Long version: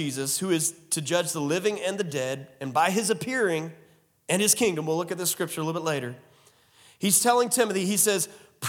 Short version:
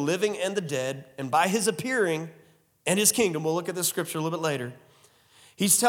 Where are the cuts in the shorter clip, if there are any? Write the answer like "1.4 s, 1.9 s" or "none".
none